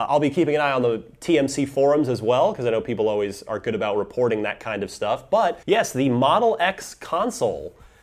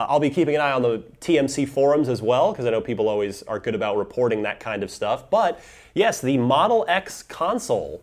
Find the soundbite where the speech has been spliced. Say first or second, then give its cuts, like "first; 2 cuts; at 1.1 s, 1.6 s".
first; 1 cut; at 5.6 s